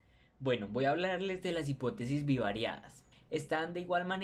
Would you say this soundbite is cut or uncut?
cut